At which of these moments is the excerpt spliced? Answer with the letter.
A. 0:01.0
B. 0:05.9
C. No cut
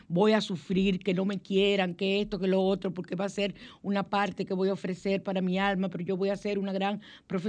C